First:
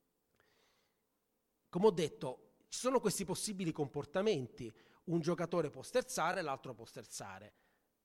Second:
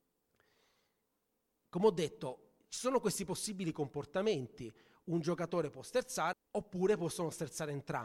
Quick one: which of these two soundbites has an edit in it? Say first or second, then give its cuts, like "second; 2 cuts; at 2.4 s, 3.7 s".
second; 1 cut; at 6.3 s